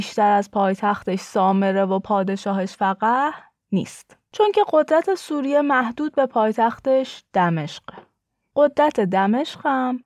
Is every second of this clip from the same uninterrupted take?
no; 1 cut; at 4.3 s

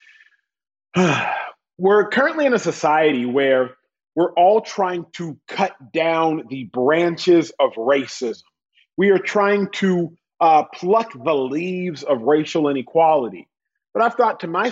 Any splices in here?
no; 0 cuts

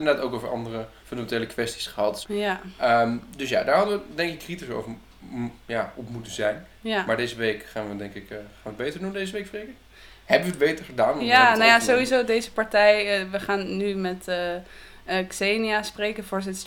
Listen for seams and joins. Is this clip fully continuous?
no; 2 cuts; at 1.0 s, 2.2 s

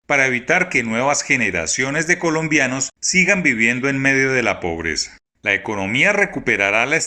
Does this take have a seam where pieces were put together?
yes; 1 cut; at 5.3 s

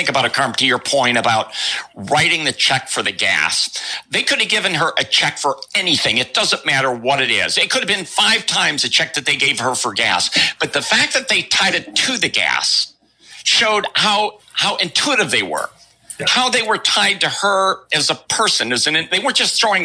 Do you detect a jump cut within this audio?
no; 0 cuts

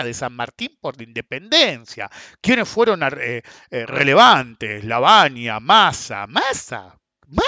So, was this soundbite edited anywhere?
no; 0 cuts

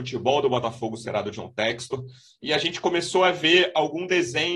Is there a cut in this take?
no; 0 cuts

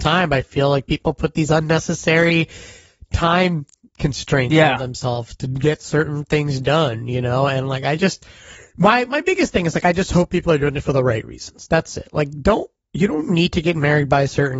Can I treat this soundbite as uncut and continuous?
yes; 0 cuts

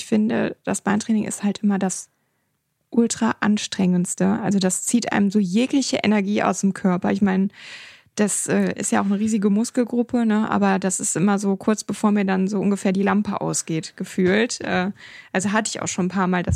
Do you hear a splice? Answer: no; 0 cuts

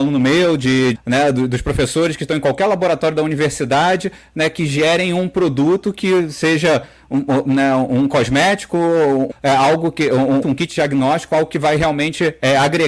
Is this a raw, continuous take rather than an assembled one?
no; 3 cuts; at 0.9 s, 9.3 s, 10.4 s

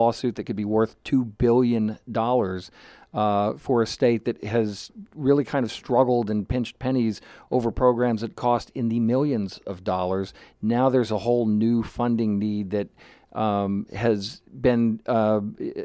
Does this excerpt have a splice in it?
no; 0 cuts

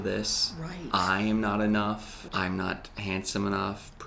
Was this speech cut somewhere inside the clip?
yes; 1 cut; at 2.3 s

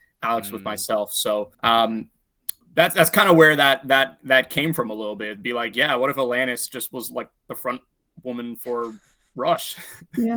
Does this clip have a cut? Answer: yes; 1 cut; at 1.5 s

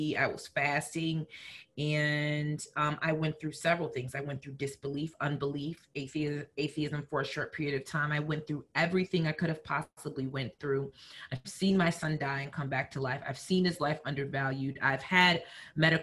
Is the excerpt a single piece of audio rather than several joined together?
yes; 0 cuts

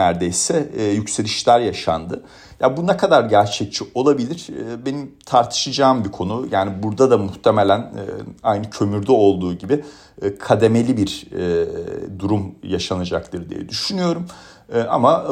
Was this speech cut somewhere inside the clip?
no; 0 cuts

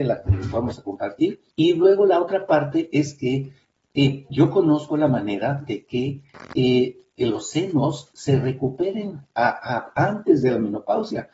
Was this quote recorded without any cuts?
no; 1 cut; at 1.5 s

